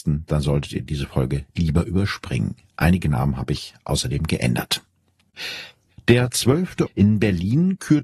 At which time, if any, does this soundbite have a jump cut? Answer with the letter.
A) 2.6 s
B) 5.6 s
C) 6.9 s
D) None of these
C